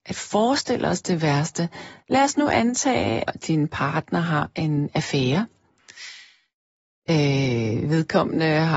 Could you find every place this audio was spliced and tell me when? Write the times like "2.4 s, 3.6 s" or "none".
3.3 s